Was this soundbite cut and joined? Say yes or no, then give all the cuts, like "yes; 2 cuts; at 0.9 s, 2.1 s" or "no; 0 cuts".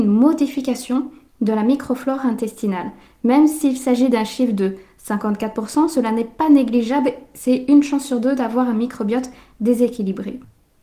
no; 0 cuts